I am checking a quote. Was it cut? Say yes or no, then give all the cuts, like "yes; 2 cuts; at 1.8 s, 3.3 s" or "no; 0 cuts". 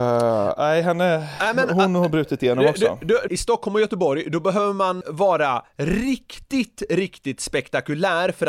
yes; 2 cuts; at 3.3 s, 5.0 s